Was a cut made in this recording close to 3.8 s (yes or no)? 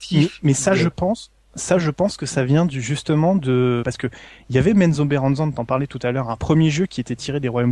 yes